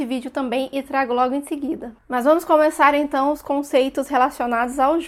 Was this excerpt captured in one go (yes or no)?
yes